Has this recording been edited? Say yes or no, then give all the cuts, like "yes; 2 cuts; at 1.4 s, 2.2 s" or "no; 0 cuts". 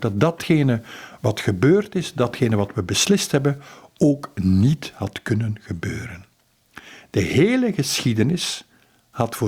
no; 0 cuts